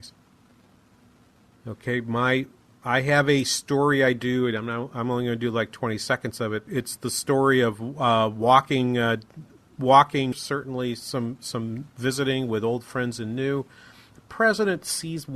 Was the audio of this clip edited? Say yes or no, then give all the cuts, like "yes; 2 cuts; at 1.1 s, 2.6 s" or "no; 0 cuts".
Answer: yes; 2 cuts; at 6.7 s, 10.3 s